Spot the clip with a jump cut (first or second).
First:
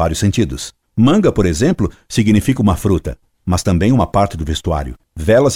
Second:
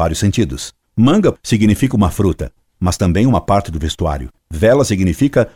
second